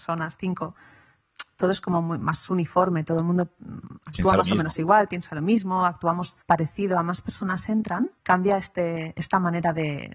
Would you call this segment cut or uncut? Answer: cut